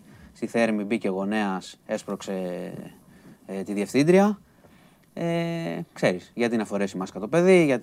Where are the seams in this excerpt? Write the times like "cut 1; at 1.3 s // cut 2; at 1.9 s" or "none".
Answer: none

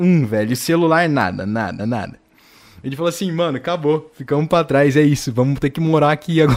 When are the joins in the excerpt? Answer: cut 1; at 1.8 s

